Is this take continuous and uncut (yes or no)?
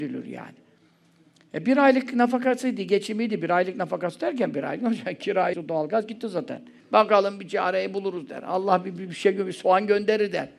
no